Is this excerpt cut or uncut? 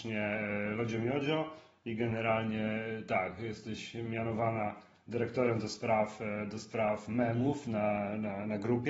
uncut